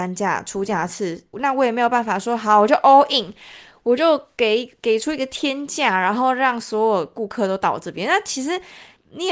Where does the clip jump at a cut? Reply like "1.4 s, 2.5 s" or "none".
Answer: 1.3 s